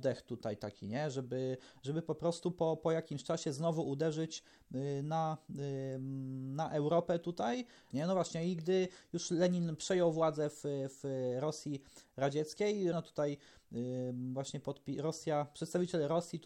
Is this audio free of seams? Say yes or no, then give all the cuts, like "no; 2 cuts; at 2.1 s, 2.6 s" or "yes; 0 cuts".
no; 2 cuts; at 7.9 s, 12.9 s